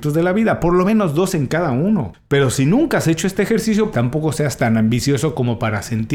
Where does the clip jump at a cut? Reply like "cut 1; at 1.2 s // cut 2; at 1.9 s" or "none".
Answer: cut 1; at 3.9 s